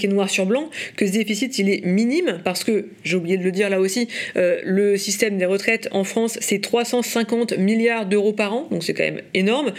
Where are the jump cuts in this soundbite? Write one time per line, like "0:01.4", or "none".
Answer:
none